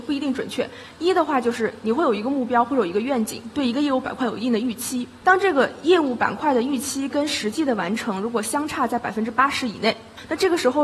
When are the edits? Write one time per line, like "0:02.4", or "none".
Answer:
none